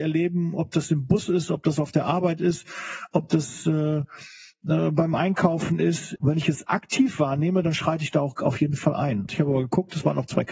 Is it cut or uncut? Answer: cut